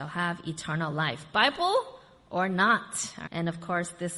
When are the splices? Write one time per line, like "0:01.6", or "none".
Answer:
0:03.3